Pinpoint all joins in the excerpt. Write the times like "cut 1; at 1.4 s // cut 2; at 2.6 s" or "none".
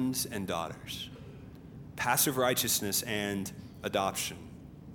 none